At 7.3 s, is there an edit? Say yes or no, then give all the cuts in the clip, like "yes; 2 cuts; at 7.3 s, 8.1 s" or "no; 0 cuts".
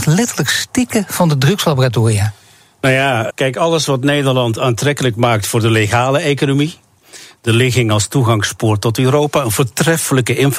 no; 1 cut; at 3.3 s